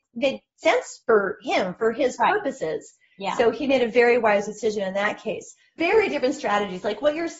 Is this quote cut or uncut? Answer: cut